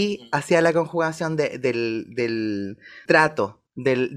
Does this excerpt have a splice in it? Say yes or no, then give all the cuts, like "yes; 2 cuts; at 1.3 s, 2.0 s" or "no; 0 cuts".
yes; 1 cut; at 3.1 s